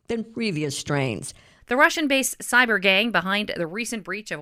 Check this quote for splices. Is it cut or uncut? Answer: cut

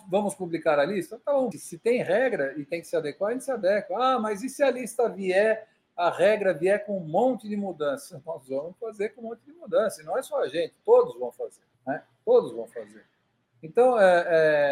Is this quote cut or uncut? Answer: cut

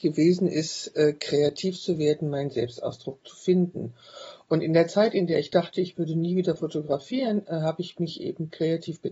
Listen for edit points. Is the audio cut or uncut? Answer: uncut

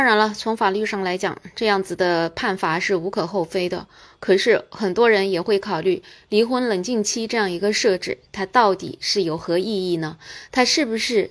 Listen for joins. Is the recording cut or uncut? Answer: uncut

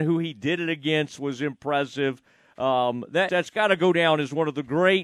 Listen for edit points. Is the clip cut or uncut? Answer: cut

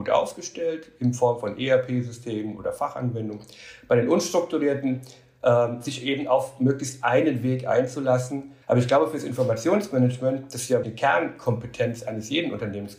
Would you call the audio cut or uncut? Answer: cut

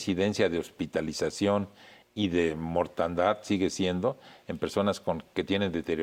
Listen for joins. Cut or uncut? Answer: uncut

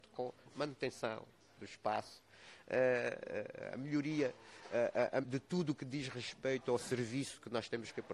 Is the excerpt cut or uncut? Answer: cut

